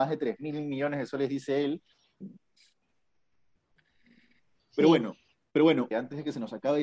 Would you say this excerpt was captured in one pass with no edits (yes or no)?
no